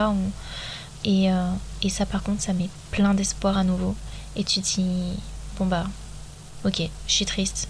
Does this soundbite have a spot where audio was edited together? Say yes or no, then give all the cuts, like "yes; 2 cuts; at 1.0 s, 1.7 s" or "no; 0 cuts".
yes; 1 cut; at 1.0 s